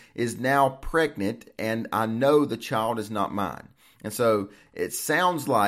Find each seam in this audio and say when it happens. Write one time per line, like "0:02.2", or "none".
none